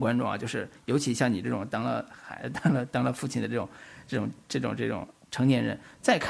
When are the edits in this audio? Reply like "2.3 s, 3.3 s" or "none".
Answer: none